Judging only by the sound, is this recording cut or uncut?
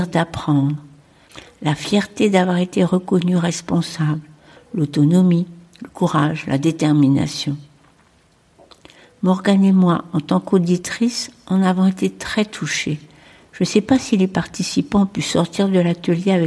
uncut